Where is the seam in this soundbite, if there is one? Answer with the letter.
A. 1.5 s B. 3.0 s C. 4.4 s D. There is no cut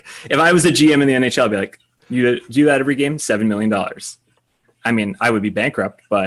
D